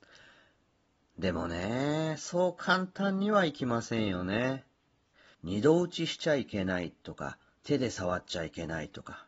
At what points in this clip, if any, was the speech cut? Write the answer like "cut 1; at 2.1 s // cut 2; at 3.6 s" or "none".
cut 1; at 5.3 s

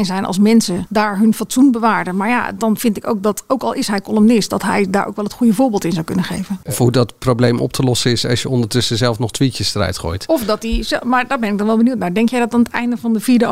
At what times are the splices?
cut 1; at 6.7 s

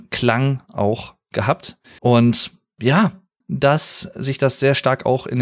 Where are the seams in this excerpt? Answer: cut 1; at 2.0 s // cut 2; at 3.4 s

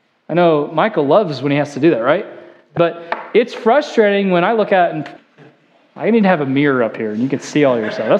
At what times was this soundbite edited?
cut 1; at 2.8 s // cut 2; at 5.2 s

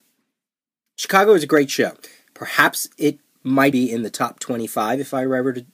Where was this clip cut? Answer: cut 1; at 2.3 s // cut 2; at 3.7 s

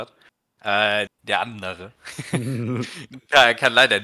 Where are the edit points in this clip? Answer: cut 1; at 1.1 s

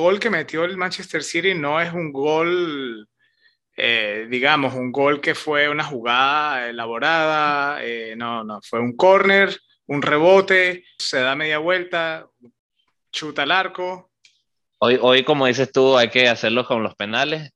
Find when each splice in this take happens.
cut 1; at 11.0 s // cut 2; at 14.7 s

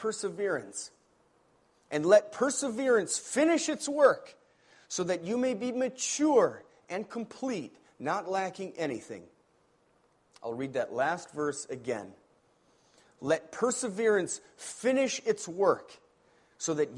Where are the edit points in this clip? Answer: none

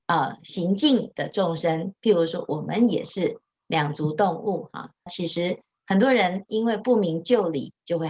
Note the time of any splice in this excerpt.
cut 1; at 5.1 s

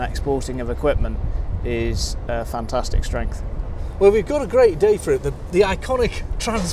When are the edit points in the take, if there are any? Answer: none

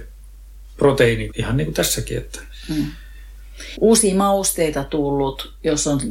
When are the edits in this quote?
cut 1; at 1.3 s // cut 2; at 3.7 s

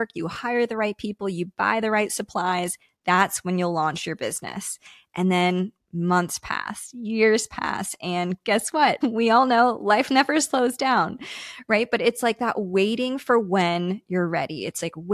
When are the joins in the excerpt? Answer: cut 1; at 9.0 s

